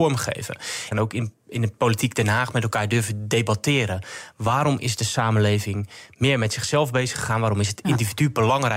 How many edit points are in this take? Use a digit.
1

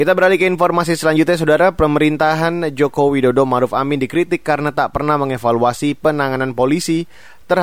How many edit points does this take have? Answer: 0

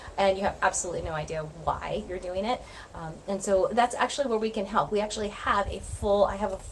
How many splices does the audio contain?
0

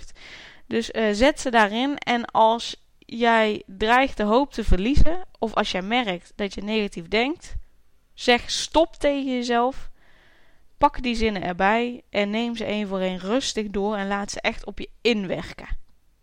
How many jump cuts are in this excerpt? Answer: 0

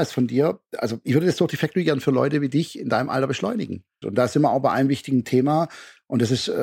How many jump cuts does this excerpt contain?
1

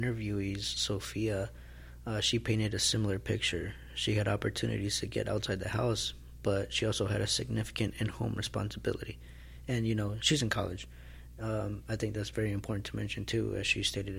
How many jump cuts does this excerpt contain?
0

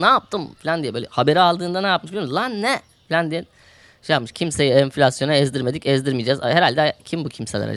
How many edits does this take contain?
0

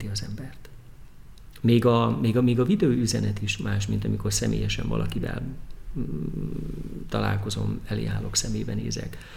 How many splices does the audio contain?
0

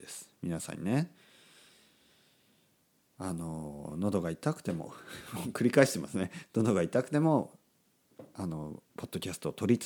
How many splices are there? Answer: 1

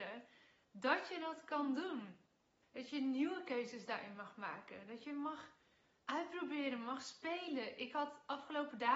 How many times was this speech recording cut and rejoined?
1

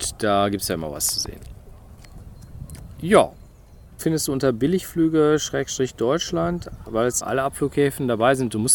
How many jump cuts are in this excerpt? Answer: 2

